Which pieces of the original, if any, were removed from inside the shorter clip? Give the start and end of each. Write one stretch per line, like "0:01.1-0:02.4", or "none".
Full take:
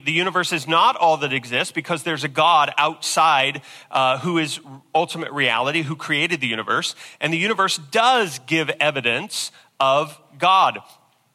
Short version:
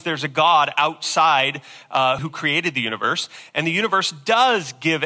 0:04.2-0:05.8

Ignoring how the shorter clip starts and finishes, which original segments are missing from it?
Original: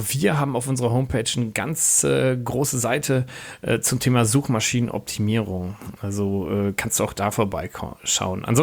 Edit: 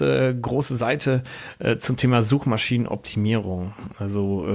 none

